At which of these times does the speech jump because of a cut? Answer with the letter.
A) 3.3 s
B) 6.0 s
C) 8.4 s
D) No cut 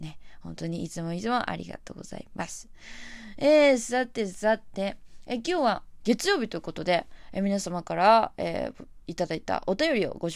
B